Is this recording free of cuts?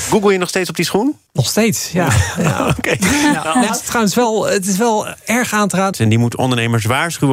no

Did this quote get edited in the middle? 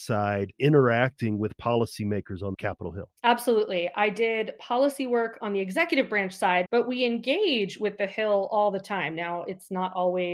yes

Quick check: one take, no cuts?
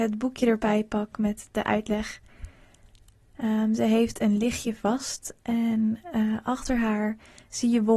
no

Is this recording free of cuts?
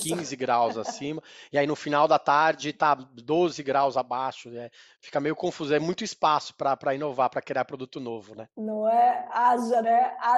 yes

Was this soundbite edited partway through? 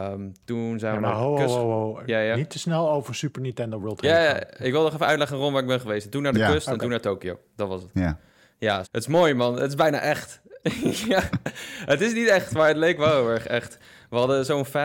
yes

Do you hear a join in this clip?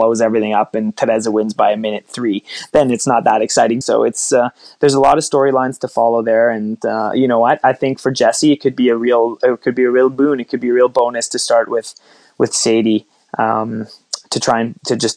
yes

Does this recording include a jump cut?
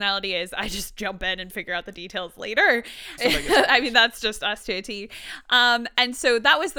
yes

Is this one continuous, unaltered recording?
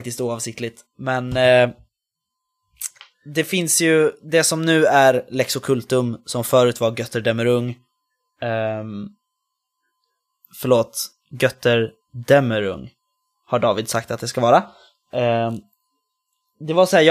yes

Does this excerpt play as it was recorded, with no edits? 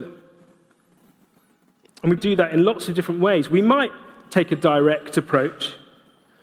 no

